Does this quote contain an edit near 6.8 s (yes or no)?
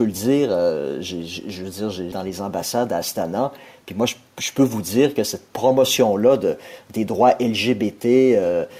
no